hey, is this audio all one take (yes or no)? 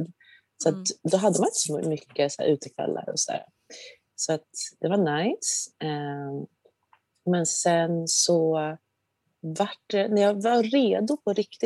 yes